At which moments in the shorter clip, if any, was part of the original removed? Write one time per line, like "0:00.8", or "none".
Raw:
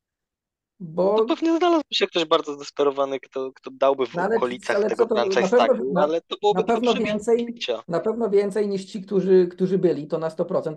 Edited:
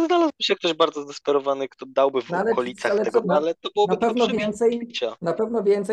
0:01.7
0:03.2